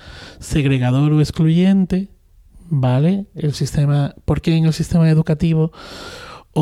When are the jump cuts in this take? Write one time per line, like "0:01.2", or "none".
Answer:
none